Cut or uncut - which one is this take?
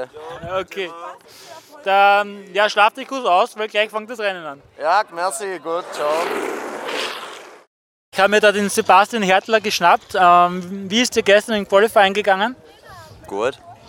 uncut